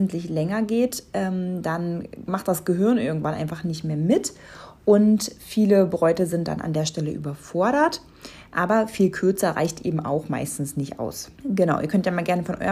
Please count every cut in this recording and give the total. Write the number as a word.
one